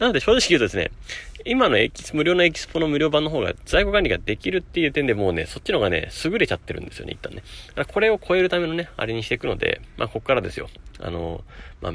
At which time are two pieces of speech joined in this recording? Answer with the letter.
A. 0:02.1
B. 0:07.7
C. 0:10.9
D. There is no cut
D